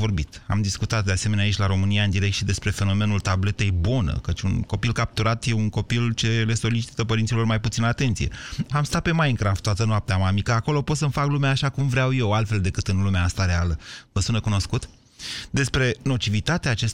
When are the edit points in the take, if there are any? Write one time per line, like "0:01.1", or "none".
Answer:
0:08.7